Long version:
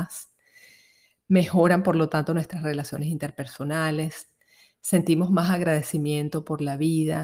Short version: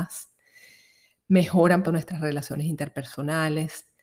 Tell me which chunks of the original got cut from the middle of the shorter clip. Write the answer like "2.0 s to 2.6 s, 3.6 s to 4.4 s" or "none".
1.8 s to 2.3 s